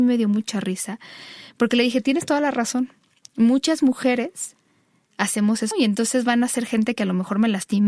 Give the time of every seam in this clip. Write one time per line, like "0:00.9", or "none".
0:05.7

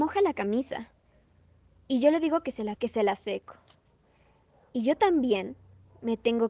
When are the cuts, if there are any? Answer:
0:02.8

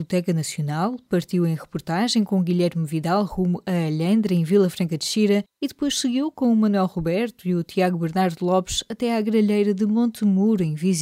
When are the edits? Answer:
none

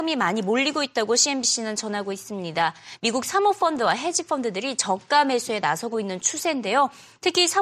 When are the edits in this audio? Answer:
none

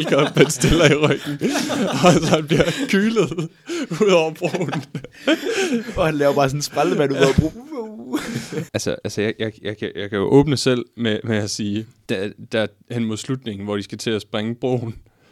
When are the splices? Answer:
0:08.7
0:12.1

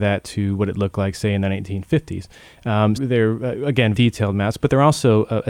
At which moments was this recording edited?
0:02.9
0:03.9

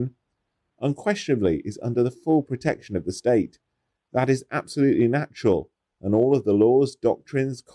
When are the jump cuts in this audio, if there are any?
none

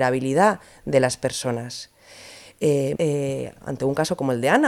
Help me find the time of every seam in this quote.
0:02.9

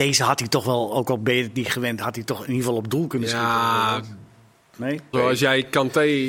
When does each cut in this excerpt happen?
0:05.1

